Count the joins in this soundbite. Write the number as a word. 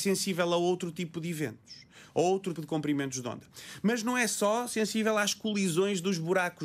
one